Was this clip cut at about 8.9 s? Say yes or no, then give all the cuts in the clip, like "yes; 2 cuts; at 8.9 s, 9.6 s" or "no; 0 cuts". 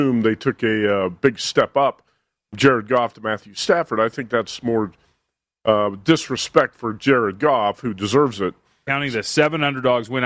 yes; 1 cut; at 8.9 s